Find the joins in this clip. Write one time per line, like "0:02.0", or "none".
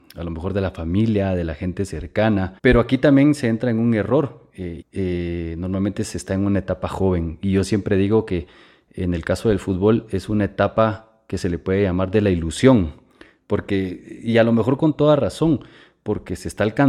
0:02.6
0:04.8